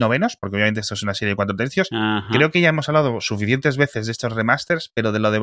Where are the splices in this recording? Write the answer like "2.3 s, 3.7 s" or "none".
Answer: none